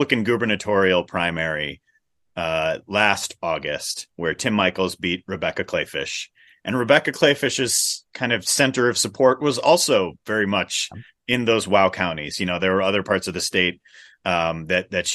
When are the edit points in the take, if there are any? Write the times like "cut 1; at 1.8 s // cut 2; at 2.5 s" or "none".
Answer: none